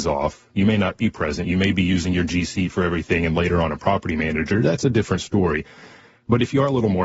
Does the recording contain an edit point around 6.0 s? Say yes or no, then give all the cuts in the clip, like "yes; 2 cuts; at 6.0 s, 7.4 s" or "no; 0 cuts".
no; 0 cuts